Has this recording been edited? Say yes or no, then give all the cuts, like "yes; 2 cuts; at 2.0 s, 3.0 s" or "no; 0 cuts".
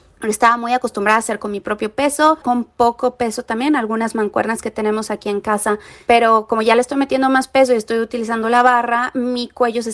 yes; 1 cut; at 2.4 s